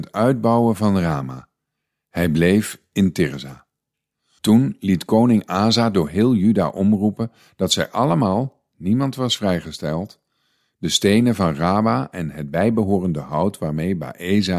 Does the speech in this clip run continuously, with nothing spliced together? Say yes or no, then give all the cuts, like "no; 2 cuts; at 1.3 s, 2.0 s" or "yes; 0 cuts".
yes; 0 cuts